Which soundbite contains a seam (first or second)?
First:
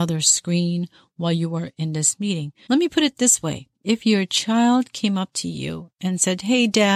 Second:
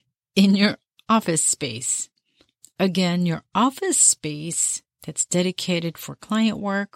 first